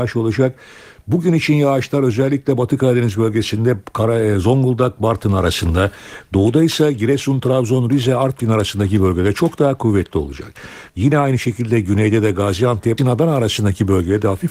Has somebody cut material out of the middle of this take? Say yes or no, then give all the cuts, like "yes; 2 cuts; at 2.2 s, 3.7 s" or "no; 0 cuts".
yes; 2 cuts; at 10.9 s, 13.0 s